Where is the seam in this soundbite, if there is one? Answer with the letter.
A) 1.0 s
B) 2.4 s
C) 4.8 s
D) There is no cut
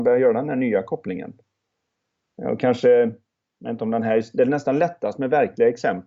D